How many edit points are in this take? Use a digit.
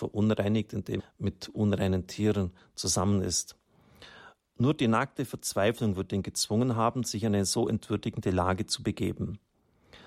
1